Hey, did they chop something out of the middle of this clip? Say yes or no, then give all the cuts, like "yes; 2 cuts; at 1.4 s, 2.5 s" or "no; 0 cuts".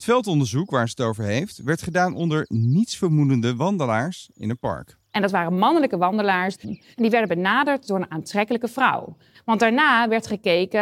yes; 2 cuts; at 6.6 s, 9.3 s